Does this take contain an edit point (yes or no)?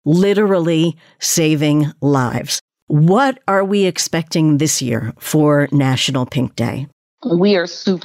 no